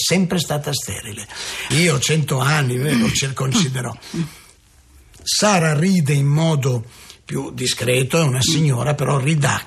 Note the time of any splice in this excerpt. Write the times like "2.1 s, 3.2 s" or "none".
1.7 s